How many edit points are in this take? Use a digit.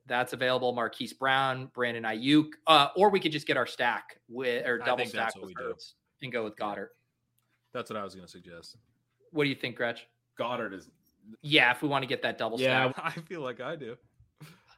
2